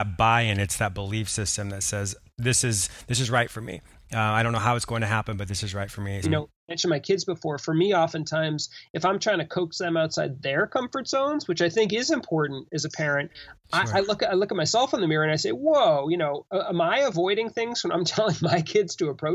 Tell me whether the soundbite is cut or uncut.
cut